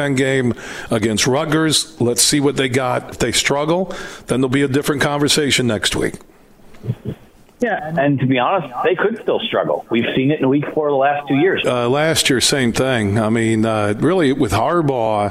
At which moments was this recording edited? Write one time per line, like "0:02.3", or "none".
0:03.1
0:07.8
0:11.6